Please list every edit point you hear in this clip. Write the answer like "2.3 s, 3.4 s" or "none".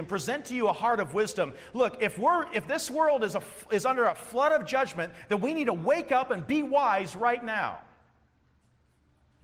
none

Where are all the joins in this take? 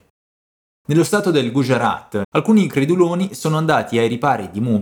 2.2 s

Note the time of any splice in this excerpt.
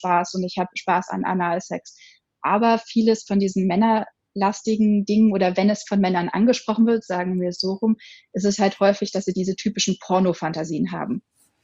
none

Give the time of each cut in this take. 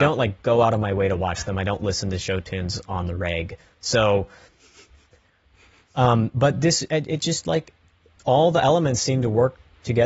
none

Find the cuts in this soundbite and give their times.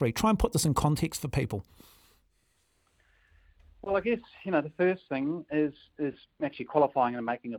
none

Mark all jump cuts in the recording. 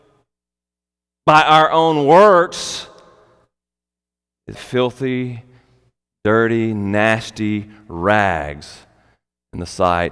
4.5 s

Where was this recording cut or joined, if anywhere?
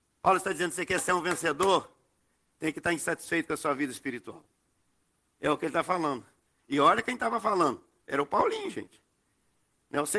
6.6 s

